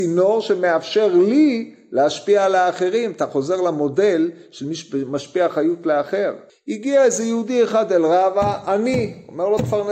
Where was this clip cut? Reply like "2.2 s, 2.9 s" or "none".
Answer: 6.5 s

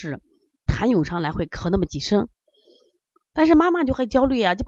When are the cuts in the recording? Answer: none

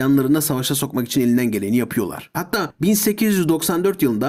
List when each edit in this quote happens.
2.3 s

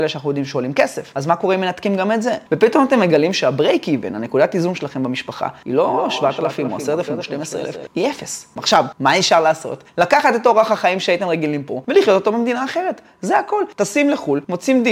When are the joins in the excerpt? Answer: 2.5 s, 8.6 s

